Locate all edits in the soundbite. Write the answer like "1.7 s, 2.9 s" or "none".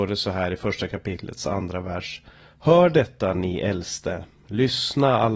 none

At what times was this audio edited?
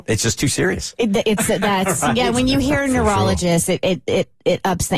none

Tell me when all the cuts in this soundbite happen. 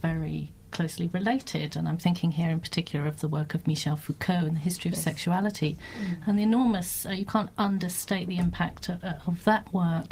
none

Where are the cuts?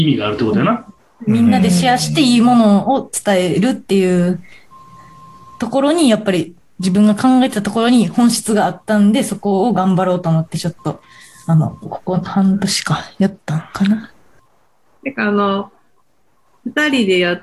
none

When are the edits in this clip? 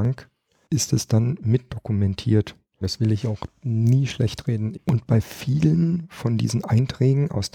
2.8 s, 4.7 s

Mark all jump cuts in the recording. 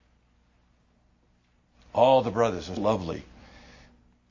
2.8 s

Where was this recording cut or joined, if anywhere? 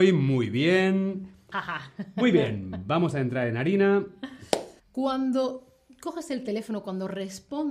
1.5 s, 4.8 s

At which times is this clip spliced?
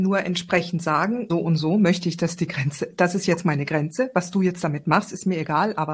1.3 s

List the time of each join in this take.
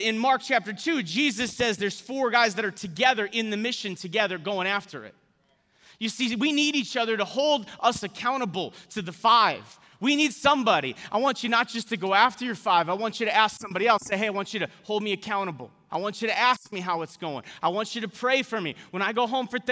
15.9 s

